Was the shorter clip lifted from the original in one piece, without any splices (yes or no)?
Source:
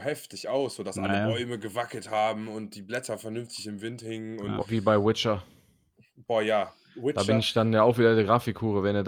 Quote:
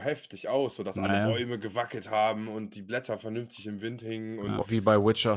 yes